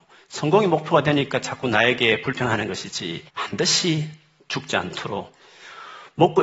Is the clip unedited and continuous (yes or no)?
no